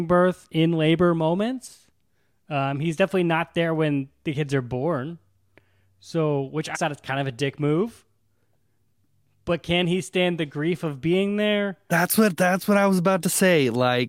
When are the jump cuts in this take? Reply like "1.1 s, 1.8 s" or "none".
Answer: 6.7 s